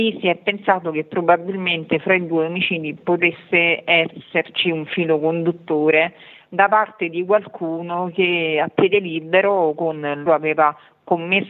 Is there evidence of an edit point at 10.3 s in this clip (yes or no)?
yes